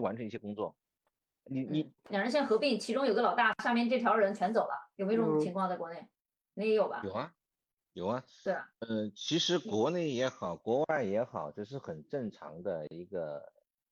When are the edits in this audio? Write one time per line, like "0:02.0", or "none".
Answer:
0:02.0